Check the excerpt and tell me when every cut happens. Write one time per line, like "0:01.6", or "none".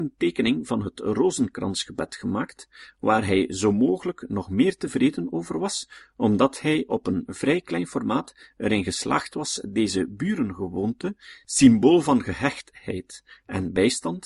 none